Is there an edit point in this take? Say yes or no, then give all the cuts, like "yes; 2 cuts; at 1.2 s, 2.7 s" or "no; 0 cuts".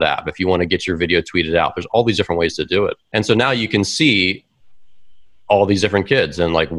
yes; 1 cut; at 3.0 s